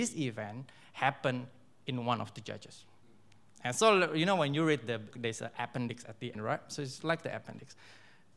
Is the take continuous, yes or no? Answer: no